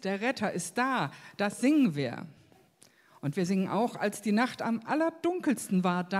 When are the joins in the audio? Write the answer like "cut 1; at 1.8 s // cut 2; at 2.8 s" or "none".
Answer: none